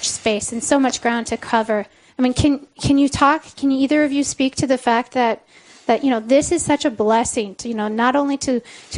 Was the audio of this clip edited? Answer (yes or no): no